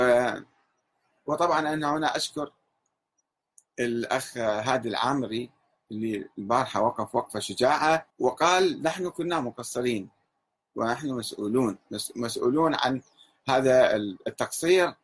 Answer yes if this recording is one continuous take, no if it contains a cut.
no